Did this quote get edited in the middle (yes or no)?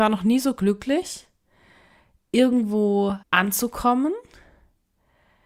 yes